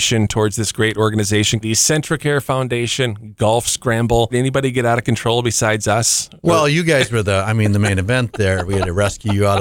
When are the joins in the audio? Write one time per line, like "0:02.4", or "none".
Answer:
0:01.6
0:04.3